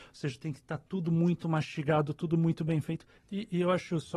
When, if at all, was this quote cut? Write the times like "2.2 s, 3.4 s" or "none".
3.2 s